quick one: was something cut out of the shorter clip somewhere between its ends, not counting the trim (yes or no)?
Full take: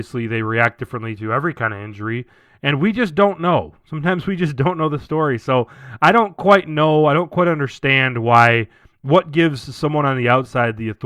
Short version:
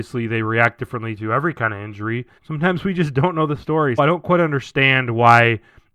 yes